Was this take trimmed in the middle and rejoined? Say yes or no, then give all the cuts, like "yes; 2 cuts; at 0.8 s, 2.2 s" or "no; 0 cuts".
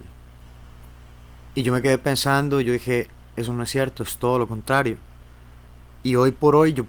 no; 0 cuts